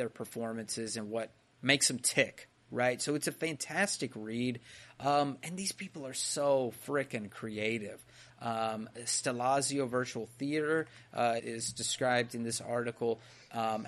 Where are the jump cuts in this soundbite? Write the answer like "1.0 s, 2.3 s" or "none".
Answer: 8.3 s, 11.4 s